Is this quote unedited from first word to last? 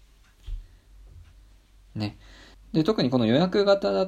no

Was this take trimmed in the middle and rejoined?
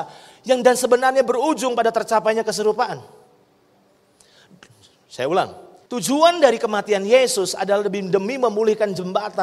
no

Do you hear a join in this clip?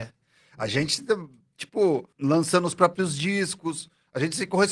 yes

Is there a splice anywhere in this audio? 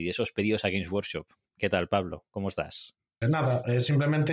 yes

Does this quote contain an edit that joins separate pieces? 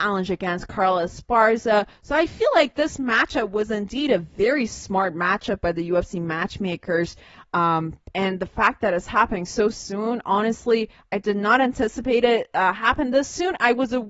no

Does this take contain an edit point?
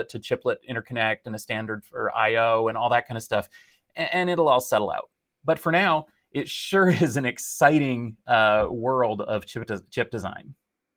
no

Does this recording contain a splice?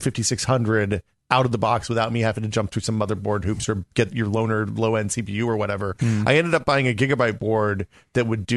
no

